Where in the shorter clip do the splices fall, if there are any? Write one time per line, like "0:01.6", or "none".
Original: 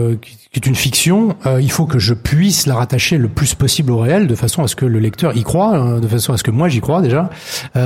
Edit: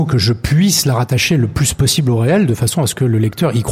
none